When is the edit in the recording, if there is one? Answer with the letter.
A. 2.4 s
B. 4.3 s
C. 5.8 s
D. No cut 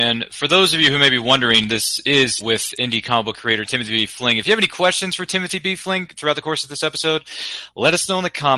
A